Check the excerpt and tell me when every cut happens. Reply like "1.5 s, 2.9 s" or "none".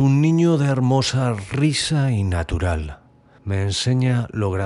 3.4 s